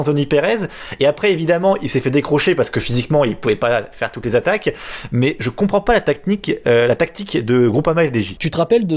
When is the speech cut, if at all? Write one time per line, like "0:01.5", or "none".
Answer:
none